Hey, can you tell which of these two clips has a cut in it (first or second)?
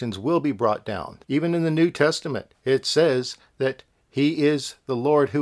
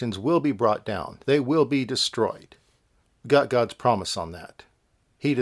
first